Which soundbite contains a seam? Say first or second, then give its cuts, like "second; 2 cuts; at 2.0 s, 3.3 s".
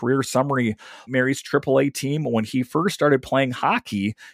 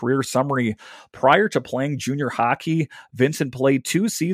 first; 1 cut; at 1.1 s